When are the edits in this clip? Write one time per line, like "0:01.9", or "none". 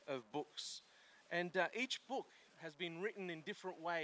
none